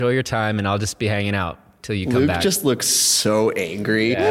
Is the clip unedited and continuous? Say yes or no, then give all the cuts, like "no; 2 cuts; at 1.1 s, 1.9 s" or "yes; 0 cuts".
yes; 0 cuts